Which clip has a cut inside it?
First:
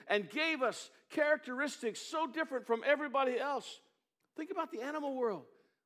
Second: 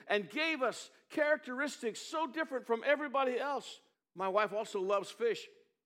second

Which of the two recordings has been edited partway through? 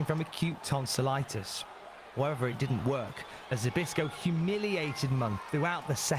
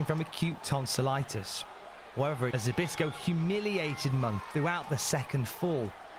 second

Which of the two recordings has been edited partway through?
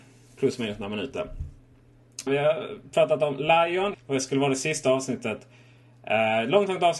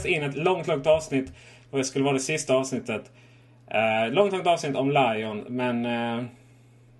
first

